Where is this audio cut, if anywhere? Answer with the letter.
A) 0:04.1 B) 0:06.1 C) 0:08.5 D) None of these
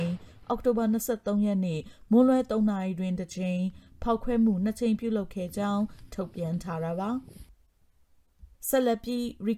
C